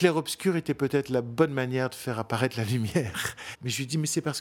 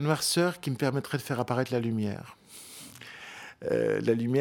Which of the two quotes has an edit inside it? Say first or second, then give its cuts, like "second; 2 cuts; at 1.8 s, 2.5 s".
first; 1 cut; at 3.5 s